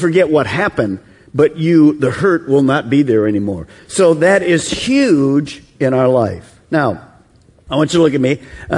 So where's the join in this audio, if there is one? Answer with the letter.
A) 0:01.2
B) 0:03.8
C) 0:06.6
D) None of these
B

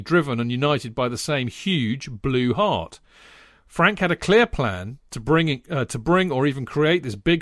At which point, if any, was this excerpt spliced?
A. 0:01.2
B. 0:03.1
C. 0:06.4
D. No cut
D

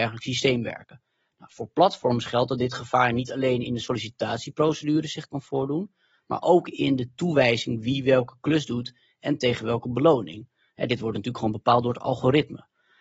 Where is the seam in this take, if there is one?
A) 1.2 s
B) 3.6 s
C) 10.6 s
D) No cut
D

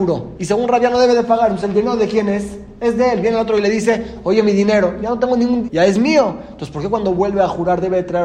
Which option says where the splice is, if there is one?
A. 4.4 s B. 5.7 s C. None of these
B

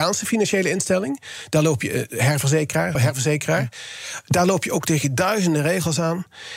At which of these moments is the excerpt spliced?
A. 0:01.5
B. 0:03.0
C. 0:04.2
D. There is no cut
B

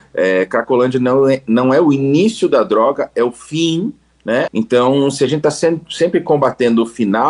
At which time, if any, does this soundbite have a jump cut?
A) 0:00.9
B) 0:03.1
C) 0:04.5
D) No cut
C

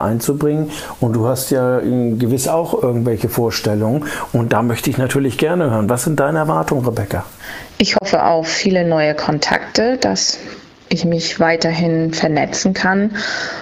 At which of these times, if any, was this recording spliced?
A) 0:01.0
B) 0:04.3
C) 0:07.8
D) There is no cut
D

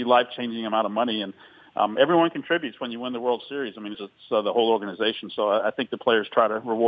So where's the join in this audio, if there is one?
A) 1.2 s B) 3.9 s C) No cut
B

